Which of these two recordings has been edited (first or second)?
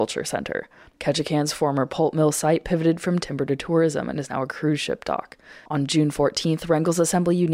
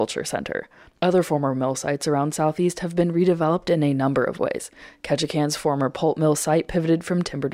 first